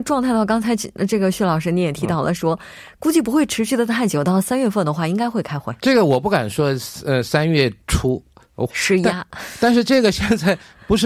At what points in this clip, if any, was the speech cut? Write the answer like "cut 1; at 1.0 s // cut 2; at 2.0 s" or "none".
cut 1; at 5.8 s // cut 2; at 8.7 s